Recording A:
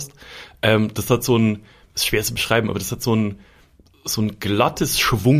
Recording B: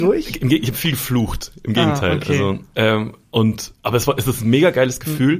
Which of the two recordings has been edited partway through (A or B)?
B